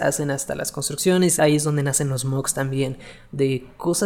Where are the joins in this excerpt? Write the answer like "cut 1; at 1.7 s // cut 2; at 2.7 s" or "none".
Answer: cut 1; at 1.4 s